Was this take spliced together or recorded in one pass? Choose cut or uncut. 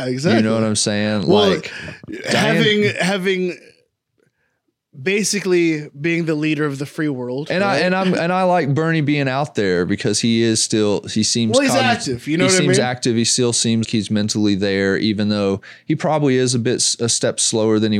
cut